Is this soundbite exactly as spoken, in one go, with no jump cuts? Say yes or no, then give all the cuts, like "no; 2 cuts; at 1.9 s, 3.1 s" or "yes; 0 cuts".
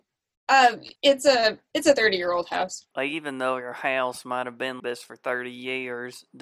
no; 3 cuts; at 1.0 s, 2.9 s, 4.8 s